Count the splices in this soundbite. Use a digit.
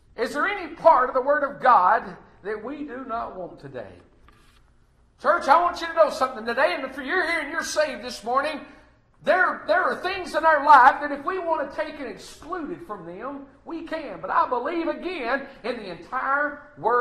0